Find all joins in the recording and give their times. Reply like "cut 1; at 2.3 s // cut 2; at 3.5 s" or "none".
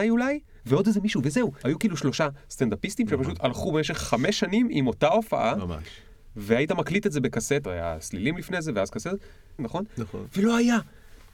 cut 1; at 1.6 s // cut 2; at 7.6 s // cut 3; at 9.6 s